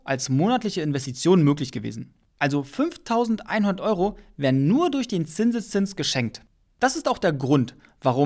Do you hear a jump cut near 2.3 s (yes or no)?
yes